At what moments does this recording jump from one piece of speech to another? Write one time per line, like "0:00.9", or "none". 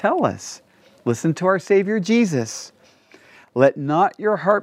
none

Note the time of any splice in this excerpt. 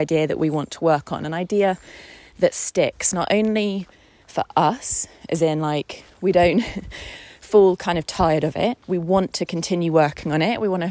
0:06.2
0:08.8

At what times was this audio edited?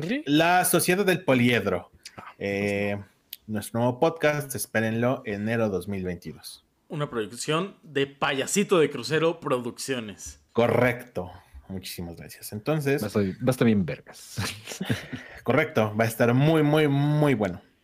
0:10.5

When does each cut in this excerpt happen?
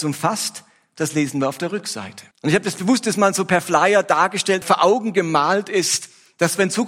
0:02.3
0:04.6

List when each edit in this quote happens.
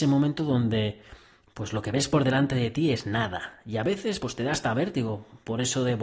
none

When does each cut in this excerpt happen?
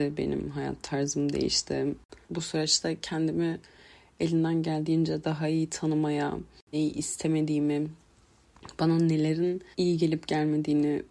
0:02.2
0:06.7
0:09.7

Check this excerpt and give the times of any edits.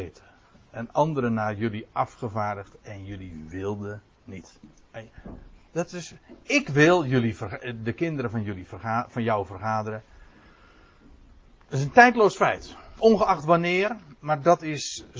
none

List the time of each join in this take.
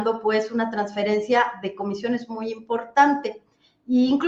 none

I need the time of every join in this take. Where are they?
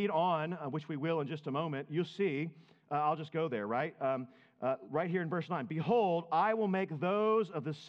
none

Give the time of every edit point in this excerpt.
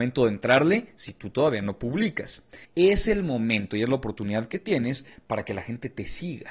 0:02.6

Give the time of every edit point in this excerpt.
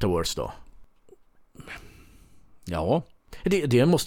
none

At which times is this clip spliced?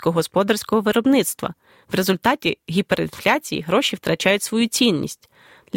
0:01.8

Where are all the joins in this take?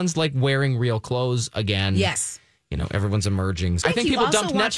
0:03.8

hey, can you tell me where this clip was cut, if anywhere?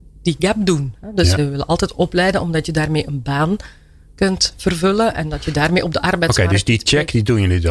0:01.4

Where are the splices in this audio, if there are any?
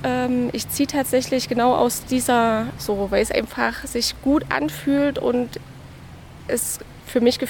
0:02.8

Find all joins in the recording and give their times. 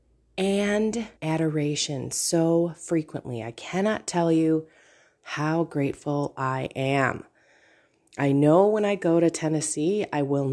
0:01.2

